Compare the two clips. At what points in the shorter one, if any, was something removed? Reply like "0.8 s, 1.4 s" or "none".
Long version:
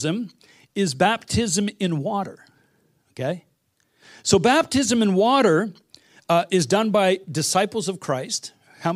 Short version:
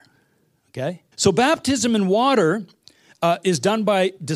1.1 s